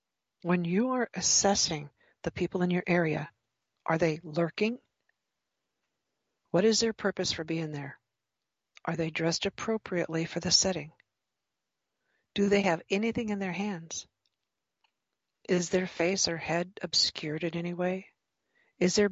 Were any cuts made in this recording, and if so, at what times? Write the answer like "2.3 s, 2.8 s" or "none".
none